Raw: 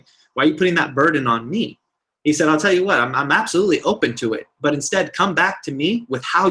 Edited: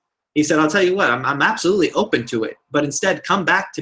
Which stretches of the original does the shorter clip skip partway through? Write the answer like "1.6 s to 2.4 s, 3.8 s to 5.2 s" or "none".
none